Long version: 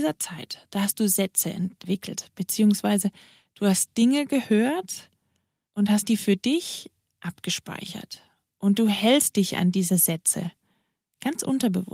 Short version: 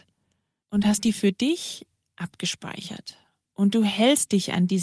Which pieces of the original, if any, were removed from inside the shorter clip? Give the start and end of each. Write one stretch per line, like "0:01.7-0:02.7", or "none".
none

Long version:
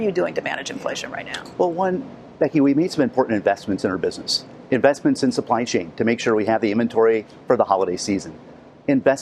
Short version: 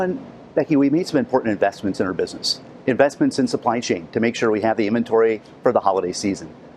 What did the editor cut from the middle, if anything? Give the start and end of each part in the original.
none

